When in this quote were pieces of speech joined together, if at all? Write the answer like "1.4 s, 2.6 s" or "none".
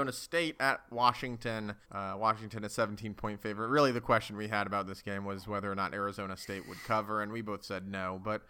1.8 s

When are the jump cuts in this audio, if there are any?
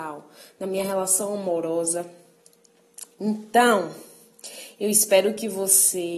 none

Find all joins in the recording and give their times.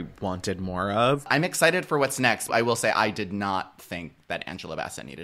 2.5 s

